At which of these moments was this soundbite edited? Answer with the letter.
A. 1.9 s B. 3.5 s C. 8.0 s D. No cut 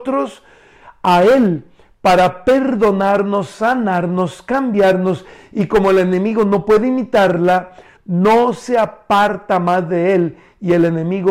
C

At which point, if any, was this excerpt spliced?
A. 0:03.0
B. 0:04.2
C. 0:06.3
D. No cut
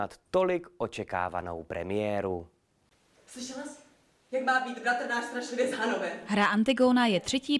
B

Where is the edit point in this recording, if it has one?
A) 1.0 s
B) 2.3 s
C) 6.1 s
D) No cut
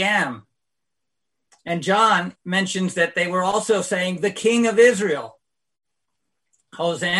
B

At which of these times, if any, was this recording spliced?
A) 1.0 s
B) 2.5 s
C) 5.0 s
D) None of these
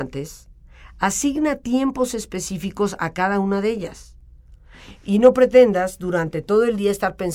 D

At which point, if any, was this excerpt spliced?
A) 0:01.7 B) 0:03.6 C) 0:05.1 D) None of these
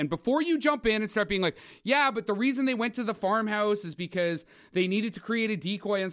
D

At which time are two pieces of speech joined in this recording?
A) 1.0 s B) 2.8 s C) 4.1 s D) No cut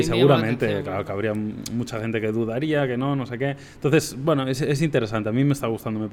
D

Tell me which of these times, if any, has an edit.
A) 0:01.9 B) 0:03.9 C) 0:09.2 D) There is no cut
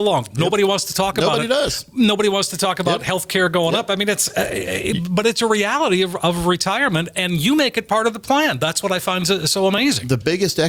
D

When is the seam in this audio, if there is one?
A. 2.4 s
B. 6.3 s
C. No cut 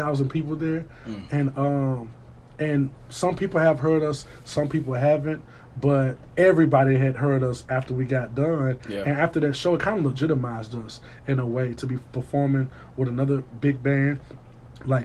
B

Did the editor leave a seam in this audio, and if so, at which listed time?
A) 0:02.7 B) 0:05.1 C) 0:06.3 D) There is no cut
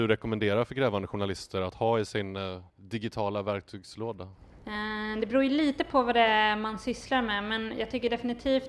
A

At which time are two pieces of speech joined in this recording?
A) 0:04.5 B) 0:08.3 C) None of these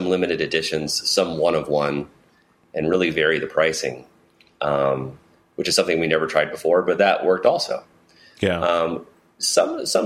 C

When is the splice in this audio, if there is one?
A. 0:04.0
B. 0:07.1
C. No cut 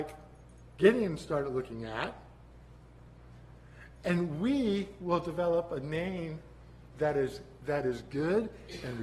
C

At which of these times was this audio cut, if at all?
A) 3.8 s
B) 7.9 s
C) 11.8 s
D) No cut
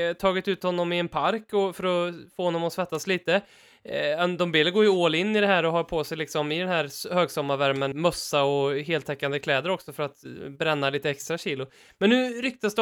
B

